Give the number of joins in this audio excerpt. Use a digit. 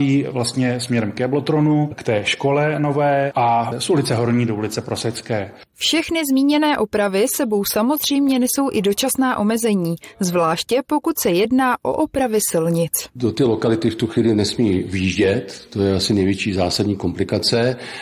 0